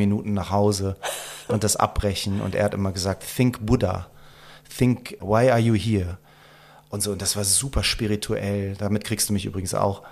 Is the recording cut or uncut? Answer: uncut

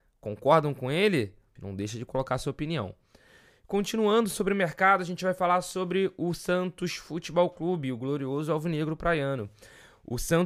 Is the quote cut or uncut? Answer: cut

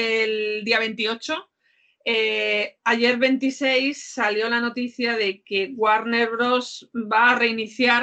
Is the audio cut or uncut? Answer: uncut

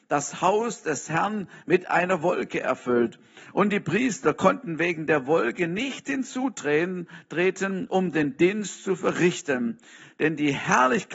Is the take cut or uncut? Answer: uncut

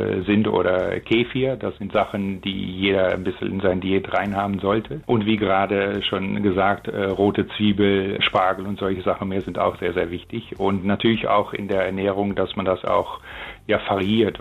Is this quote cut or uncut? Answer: cut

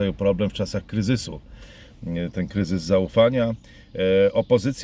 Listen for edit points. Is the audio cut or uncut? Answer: uncut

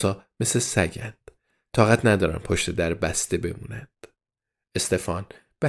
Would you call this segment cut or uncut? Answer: uncut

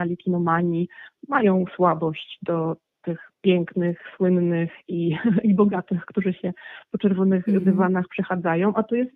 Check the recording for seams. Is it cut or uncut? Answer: uncut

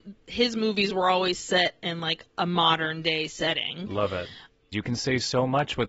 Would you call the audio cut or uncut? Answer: cut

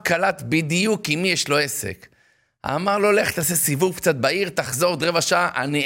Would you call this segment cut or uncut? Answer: uncut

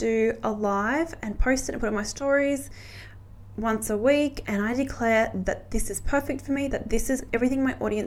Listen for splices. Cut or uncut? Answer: cut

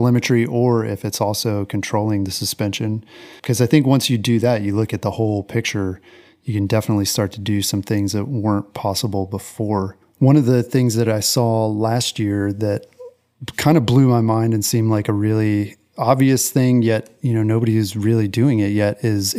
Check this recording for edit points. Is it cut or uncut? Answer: uncut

